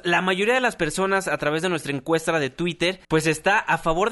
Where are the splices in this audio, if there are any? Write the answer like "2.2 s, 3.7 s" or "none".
3.0 s